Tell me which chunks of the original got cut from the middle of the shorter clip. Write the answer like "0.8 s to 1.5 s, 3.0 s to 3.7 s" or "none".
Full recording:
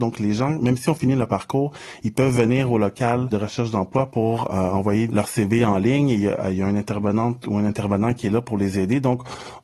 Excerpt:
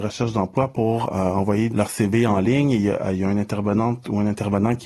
none